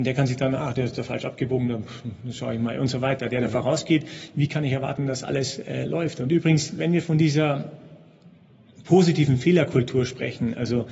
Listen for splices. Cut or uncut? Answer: uncut